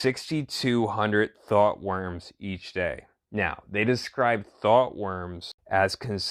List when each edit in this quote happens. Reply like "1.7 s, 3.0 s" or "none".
none